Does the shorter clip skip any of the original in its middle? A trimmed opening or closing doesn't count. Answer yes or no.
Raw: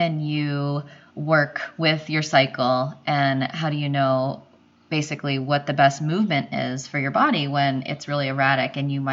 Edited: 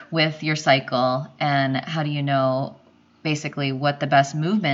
no